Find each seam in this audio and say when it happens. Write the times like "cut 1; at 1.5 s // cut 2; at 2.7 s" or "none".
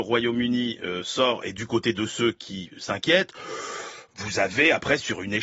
none